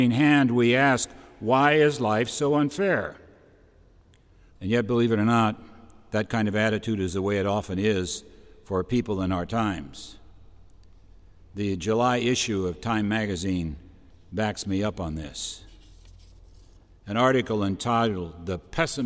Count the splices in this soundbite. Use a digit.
1